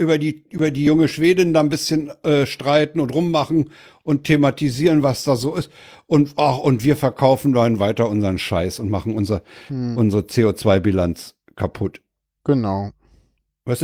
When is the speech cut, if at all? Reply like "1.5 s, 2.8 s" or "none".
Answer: none